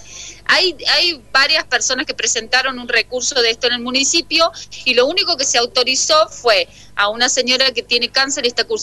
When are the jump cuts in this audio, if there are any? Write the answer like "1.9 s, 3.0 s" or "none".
none